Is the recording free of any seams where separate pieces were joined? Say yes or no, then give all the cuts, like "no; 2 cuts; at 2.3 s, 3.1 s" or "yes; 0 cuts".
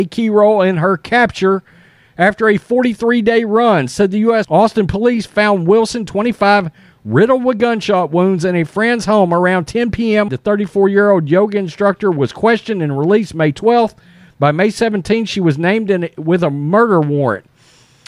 no; 2 cuts; at 4.4 s, 10.3 s